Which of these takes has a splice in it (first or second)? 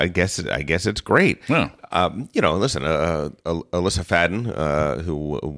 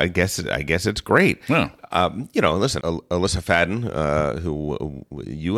second